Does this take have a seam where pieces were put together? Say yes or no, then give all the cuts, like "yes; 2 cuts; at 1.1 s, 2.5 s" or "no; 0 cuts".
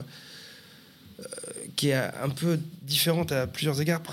no; 0 cuts